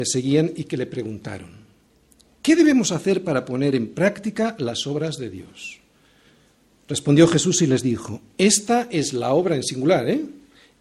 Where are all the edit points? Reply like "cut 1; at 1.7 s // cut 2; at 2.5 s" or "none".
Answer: none